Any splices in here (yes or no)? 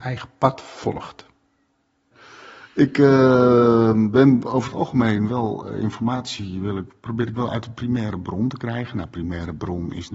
no